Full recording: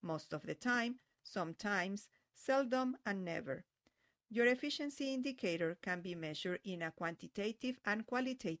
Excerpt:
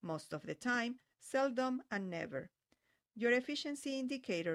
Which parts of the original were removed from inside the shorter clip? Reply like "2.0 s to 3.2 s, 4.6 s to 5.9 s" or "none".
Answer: 1.1 s to 2.3 s